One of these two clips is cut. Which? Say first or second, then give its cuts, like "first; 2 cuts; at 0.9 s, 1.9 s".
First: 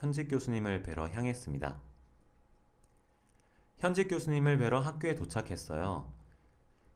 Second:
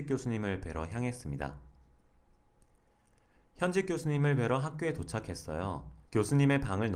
second; 1 cut; at 6.1 s